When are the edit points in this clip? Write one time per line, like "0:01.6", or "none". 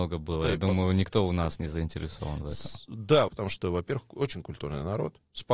0:03.3